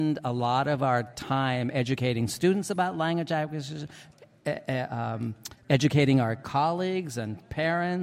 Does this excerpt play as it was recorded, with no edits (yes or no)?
yes